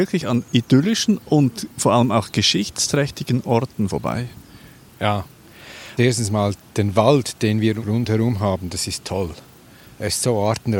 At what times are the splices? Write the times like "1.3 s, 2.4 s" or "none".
6.0 s

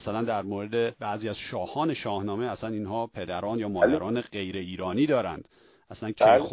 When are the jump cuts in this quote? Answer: none

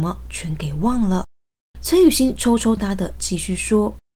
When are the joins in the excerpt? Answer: 1.7 s, 2.8 s

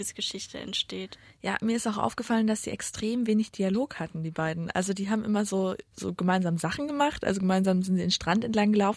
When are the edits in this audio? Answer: none

